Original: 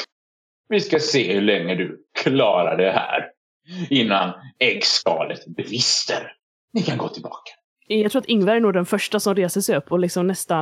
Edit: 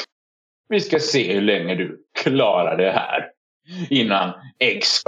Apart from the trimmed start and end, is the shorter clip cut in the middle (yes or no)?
no